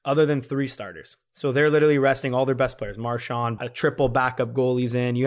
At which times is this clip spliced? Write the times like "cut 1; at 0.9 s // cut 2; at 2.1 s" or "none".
cut 1; at 3.6 s